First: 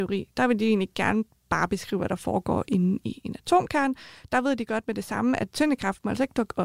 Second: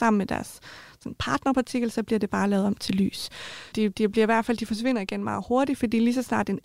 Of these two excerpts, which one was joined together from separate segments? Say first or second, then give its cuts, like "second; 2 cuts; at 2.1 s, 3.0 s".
second; 1 cut; at 3.7 s